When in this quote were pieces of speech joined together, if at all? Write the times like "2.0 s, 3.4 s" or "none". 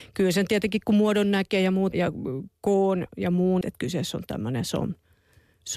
1.9 s, 3.6 s

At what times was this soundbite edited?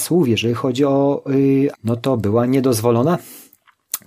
1.7 s

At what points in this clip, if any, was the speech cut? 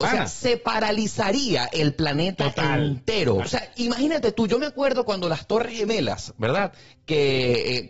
3.4 s

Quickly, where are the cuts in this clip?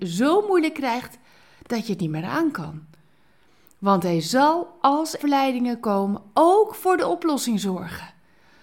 5.2 s

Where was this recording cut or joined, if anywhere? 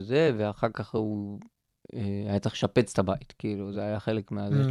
none

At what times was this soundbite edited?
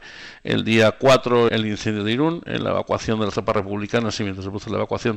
1.5 s

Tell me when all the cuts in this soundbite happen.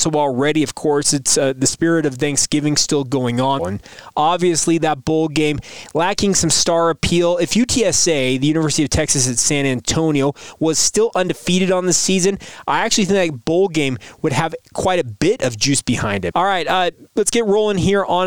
3.6 s, 16.3 s

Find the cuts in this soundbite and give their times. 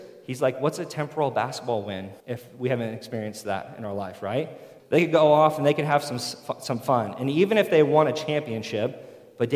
2.2 s, 4.8 s

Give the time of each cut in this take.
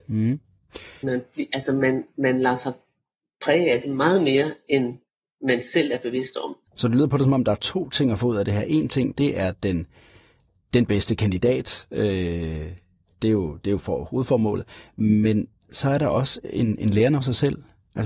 1.0 s, 6.7 s

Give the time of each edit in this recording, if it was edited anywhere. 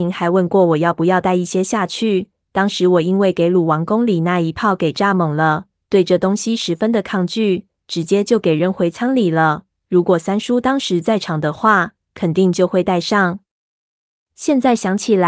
none

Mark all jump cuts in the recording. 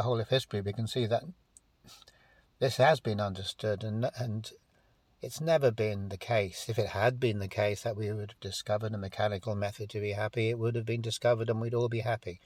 none

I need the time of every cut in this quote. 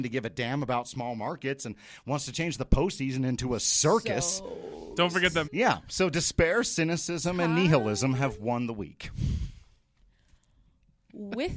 5.4 s

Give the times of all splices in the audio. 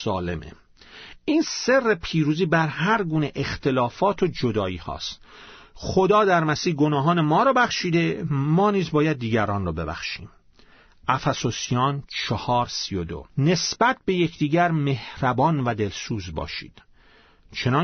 13.3 s

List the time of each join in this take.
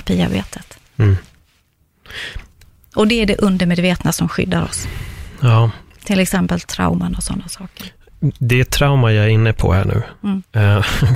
none

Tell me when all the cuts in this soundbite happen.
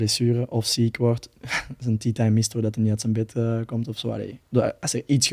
none

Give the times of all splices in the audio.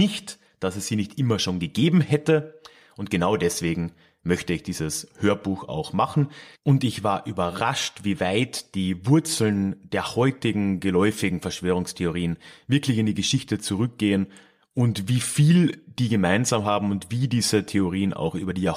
none

